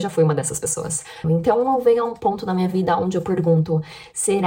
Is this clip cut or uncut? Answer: cut